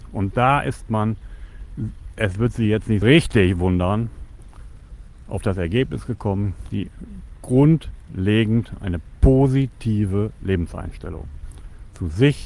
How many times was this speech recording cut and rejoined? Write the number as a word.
two